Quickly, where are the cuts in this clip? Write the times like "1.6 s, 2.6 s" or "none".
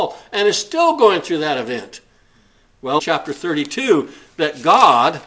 3.0 s